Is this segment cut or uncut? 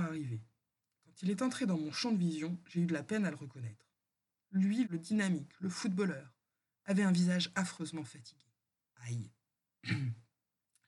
cut